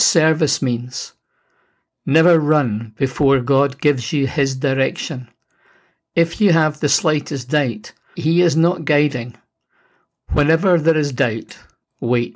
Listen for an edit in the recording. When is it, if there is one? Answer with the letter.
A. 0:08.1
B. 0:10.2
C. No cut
A